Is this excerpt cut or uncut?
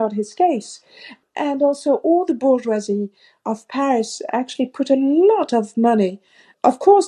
uncut